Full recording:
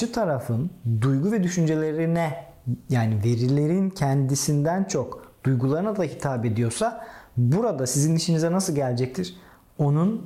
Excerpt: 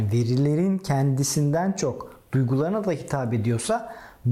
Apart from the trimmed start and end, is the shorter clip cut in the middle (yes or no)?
no